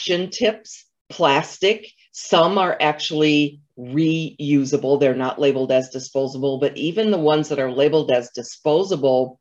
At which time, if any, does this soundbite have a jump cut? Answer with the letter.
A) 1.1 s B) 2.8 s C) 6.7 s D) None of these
A